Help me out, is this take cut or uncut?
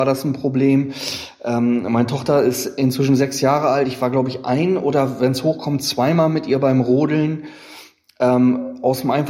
uncut